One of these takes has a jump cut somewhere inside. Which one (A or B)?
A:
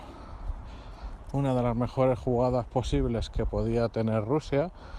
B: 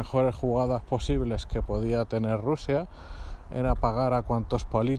A